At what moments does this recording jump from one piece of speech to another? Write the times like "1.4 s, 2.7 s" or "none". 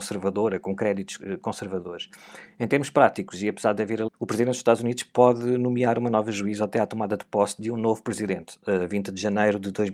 4.1 s

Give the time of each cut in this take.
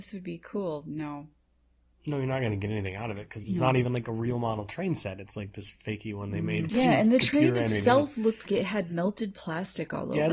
6.7 s, 8.5 s

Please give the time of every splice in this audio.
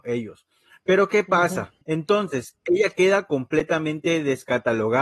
1.8 s

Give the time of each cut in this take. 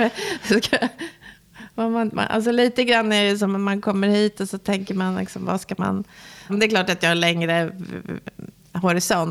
6.5 s

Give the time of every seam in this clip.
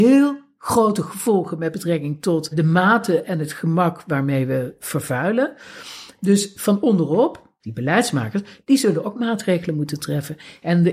2.5 s, 7.6 s

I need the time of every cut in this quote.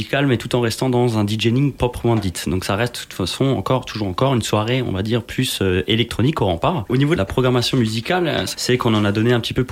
6.9 s, 8.5 s

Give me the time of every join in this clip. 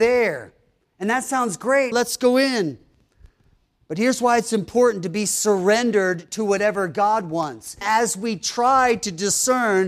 1.9 s, 7.8 s

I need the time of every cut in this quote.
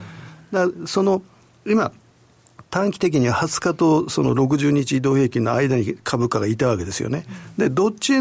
none

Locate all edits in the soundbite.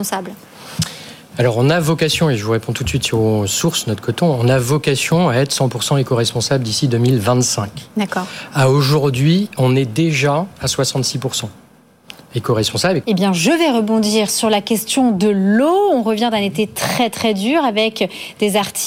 13.0 s

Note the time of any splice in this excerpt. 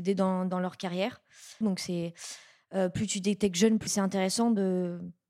1.6 s, 3.9 s

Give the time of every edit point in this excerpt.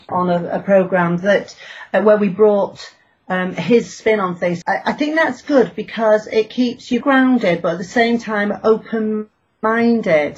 4.6 s, 7.0 s

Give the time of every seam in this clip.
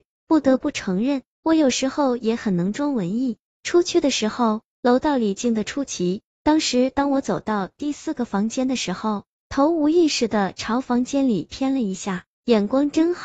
6.3 s, 9.4 s

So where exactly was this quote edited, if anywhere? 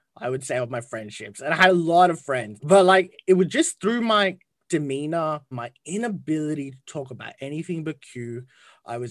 2.6 s, 5.5 s

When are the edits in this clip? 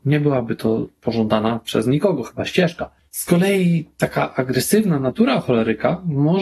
none

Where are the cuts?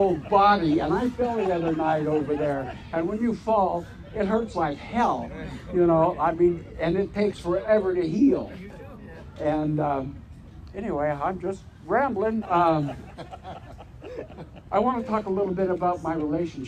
12.4 s

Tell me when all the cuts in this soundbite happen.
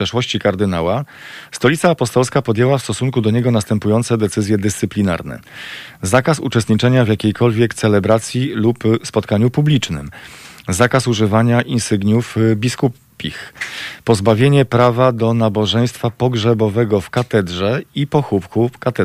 none

